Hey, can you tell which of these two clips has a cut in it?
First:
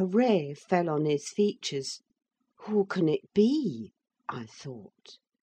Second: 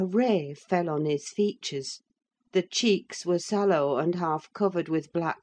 first; 1 cut; at 2.4 s

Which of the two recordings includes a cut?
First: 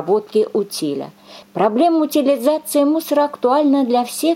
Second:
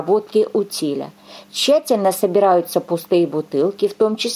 first; 1 cut; at 1.4 s

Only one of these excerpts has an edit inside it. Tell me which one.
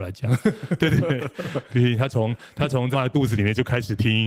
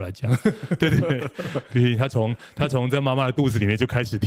first; 1 cut; at 2.9 s

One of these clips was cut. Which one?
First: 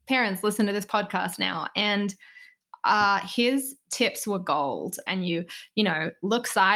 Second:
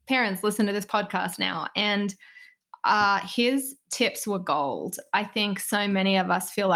first; 1 cut; at 5.1 s

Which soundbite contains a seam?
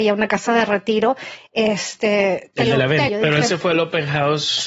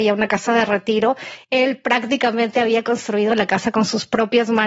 first; 2 cuts; at 1.4 s, 3.1 s

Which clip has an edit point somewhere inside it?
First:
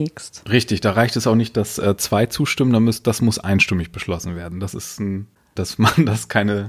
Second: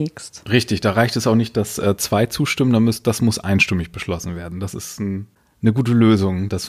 first; 1 cut; at 5.6 s

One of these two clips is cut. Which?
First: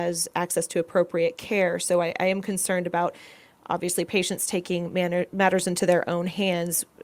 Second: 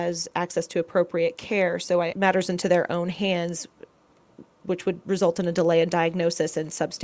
second; 1 cut; at 2.1 s

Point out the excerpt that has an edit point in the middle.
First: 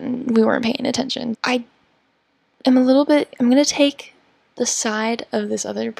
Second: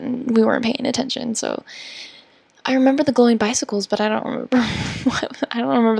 first; 1 cut; at 1.3 s

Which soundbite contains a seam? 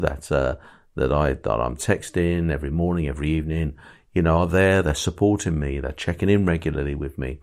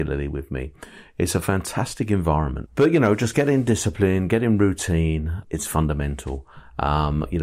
second; 2 cuts; at 2.7 s, 5.4 s

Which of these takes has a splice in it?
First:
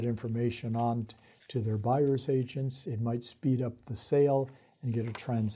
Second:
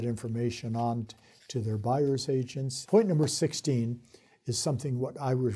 second; 1 cut; at 2.9 s

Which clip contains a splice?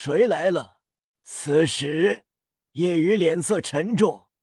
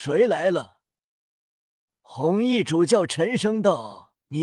first; 1 cut; at 1.1 s

